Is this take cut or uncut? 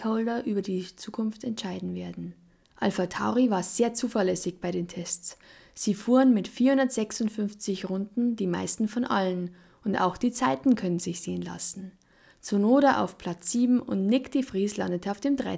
cut